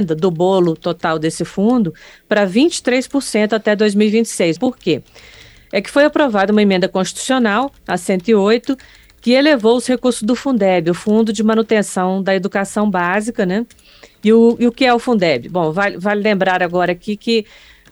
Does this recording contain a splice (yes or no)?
yes